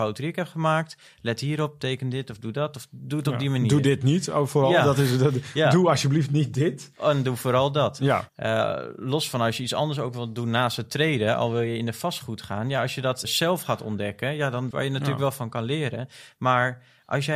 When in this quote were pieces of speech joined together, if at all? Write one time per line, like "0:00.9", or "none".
0:08.3
0:13.2
0:14.7